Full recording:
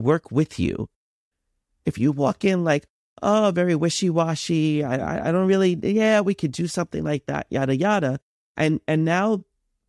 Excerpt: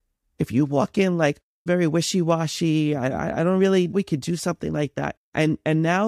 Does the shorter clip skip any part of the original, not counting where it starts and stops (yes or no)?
yes